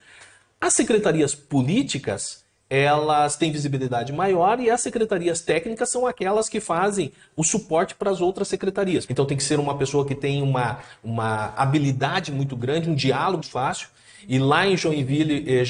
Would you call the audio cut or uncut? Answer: cut